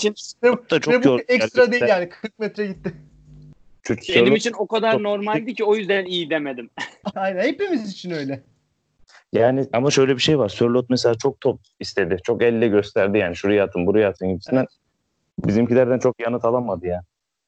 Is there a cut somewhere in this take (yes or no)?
yes